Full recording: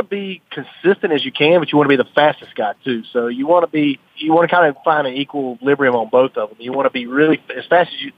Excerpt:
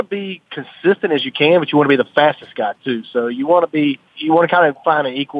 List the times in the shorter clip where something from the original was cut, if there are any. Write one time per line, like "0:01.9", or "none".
none